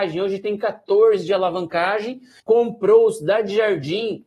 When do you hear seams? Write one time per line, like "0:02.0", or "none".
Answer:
0:02.4